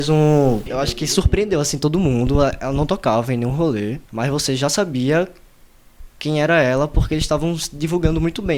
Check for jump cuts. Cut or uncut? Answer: cut